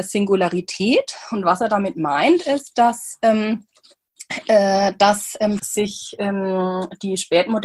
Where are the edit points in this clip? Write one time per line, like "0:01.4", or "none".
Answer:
0:05.6